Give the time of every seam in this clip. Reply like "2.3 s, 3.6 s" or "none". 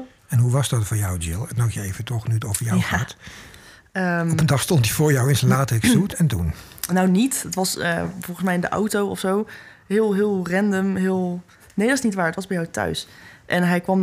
none